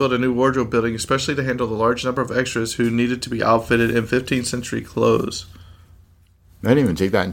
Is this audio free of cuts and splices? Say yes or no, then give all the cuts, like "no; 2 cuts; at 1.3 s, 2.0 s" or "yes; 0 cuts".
yes; 0 cuts